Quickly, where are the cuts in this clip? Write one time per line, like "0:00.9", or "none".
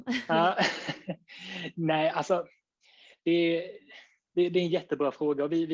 none